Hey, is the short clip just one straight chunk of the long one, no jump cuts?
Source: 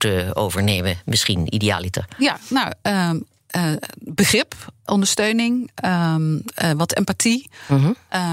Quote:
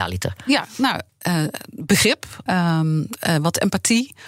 no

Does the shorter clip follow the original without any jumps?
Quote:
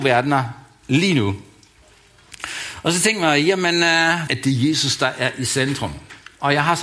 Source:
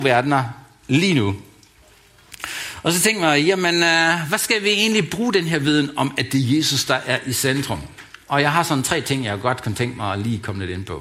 no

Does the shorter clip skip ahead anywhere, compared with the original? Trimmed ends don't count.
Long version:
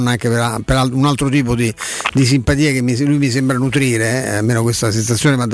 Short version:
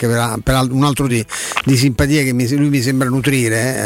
yes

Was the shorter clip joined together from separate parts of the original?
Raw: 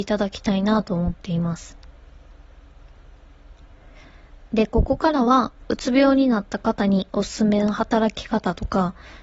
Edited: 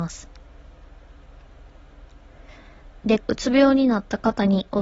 yes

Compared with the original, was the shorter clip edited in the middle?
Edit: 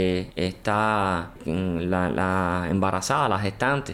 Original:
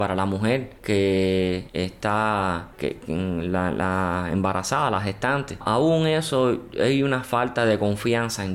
yes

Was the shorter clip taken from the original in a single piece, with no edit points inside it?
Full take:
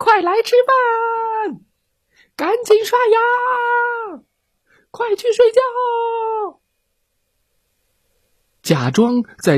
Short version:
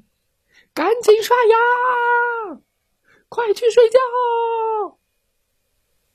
yes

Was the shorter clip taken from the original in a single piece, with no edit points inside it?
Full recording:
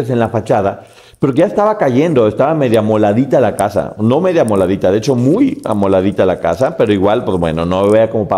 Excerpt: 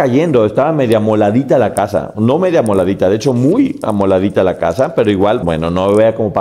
no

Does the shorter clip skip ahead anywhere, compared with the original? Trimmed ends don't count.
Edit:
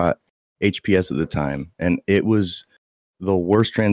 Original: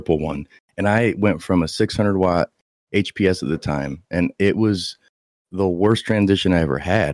no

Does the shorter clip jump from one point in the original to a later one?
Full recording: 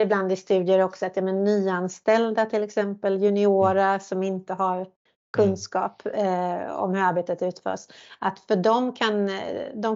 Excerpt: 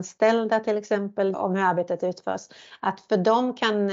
yes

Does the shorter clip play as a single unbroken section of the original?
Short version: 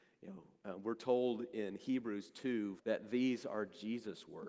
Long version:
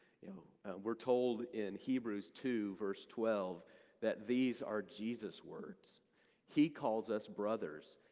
no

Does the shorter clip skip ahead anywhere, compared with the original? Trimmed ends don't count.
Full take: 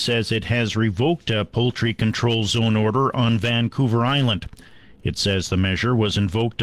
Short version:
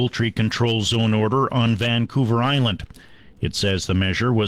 no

